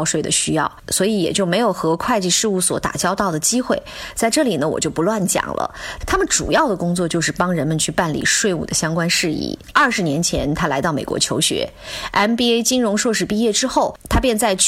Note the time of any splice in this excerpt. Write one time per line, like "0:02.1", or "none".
0:06.0
0:09.7